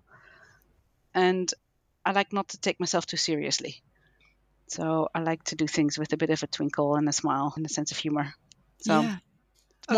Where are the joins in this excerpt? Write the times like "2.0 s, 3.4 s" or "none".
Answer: 1.1 s